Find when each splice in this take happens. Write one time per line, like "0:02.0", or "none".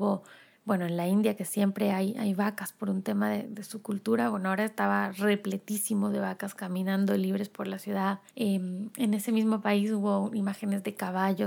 0:03.4
0:08.3